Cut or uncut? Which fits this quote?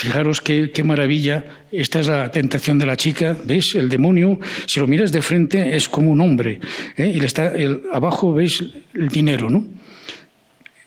uncut